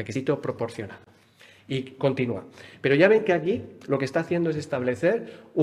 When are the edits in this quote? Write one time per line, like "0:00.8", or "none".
0:01.6